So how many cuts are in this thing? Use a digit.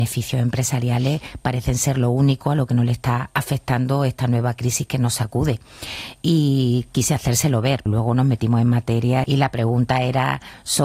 2